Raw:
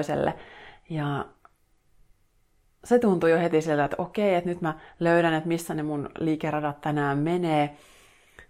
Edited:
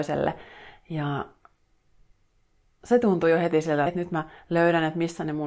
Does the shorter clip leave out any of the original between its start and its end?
yes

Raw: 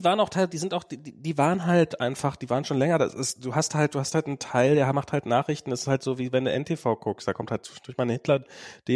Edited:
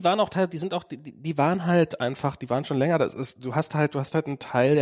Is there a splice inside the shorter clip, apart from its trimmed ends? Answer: no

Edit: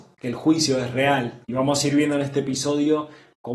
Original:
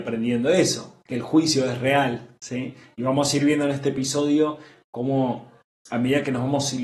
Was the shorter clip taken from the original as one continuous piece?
no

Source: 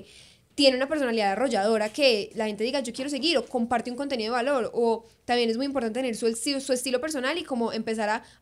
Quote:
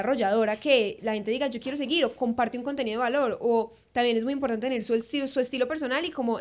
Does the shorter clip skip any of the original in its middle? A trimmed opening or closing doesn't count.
no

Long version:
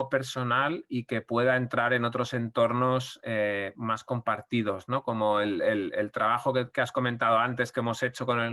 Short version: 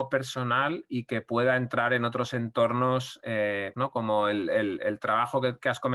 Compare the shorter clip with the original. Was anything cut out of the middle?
yes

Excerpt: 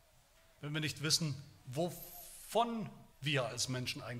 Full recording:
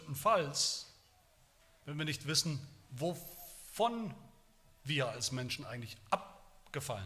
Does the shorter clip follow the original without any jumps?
no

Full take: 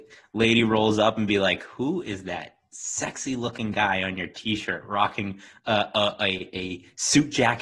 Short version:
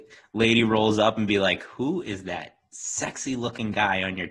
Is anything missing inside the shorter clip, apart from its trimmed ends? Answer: no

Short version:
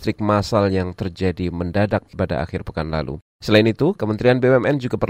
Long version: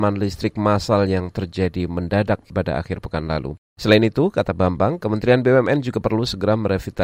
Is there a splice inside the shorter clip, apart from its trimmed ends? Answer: yes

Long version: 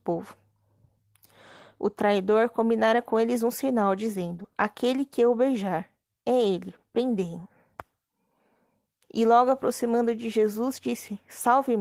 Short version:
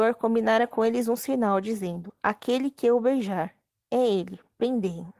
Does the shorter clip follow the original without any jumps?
yes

